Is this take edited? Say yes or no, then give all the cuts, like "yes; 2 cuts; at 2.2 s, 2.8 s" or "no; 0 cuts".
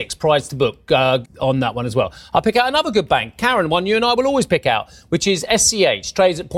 yes; 1 cut; at 1.3 s